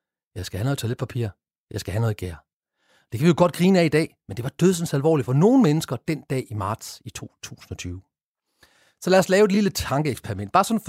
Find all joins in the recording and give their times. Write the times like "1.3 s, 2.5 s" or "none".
none